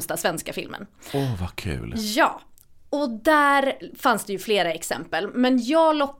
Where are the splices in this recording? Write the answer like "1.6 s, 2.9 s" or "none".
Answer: none